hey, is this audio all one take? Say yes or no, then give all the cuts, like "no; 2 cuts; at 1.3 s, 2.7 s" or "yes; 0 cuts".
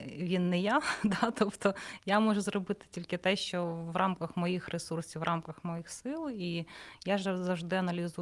yes; 0 cuts